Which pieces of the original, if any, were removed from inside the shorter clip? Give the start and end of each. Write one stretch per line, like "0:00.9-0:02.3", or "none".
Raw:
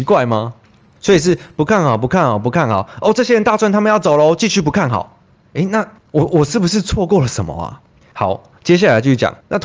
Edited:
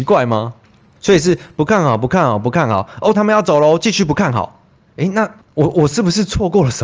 0:03.1-0:03.7